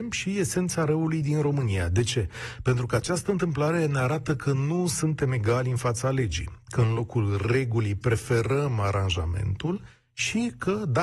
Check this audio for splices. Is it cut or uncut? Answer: uncut